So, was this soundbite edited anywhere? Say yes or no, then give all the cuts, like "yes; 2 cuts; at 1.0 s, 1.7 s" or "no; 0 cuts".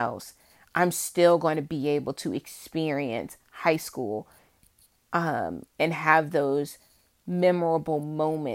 no; 0 cuts